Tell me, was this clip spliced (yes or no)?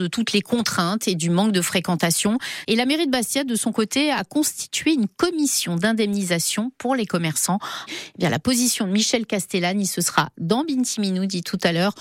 yes